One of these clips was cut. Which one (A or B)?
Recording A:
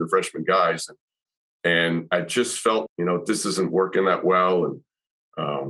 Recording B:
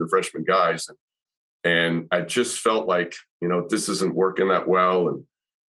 A